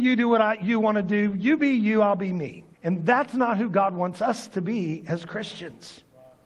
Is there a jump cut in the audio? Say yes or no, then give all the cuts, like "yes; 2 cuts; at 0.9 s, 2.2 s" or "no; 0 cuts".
yes; 1 cut; at 2.7 s